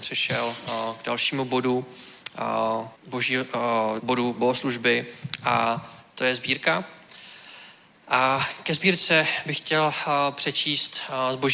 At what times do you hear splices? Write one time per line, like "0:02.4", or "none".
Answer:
0:03.0
0:04.0